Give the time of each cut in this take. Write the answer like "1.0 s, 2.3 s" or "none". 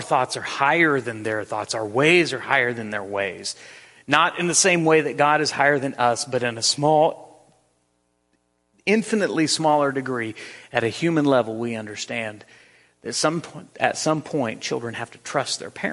none